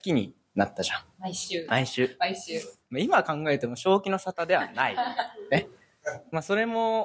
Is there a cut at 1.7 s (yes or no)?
yes